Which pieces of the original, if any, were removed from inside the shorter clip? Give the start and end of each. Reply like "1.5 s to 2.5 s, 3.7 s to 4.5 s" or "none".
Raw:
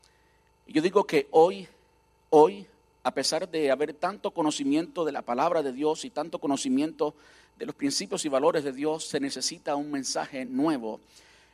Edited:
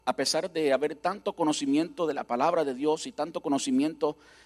none